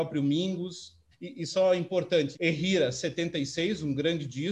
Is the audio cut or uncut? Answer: cut